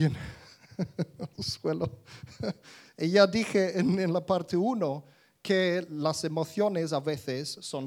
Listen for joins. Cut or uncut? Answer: uncut